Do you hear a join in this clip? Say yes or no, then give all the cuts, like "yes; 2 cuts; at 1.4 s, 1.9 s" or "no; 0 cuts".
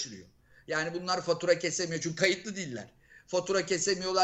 no; 0 cuts